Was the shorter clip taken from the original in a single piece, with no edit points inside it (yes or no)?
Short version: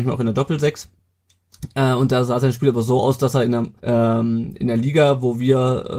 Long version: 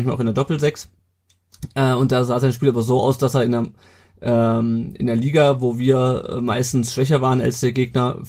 no